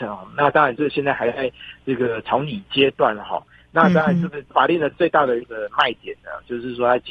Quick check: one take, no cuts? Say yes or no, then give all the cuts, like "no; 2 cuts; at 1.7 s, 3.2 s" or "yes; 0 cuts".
yes; 0 cuts